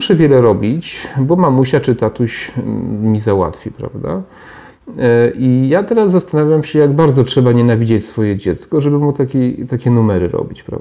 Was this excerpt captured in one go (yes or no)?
yes